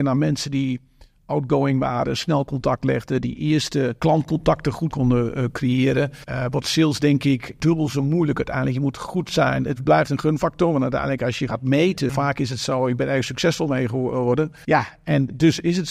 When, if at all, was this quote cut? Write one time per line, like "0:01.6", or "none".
0:12.1

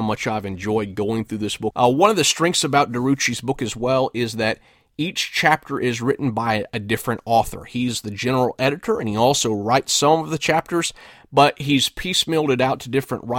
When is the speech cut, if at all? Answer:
0:01.7

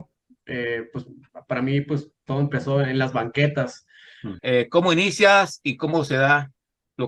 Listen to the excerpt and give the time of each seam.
0:04.4

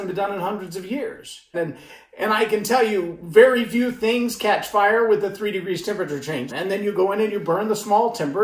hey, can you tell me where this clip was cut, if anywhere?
0:01.5
0:06.5

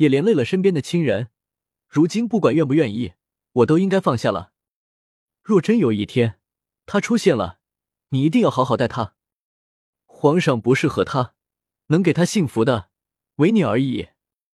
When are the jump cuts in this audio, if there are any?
none

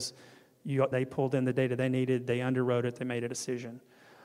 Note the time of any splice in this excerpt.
0:00.9

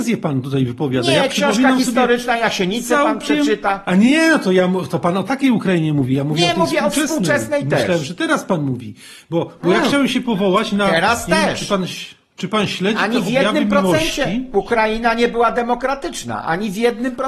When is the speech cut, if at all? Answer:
none

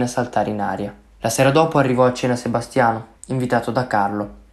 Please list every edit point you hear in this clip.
0:01.2
0:03.2

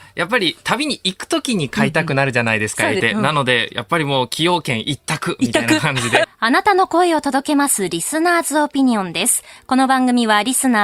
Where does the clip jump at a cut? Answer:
0:03.0
0:06.2

